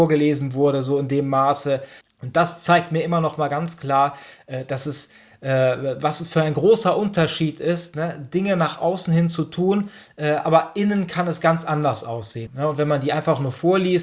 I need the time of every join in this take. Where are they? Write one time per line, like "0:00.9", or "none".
0:02.0
0:12.5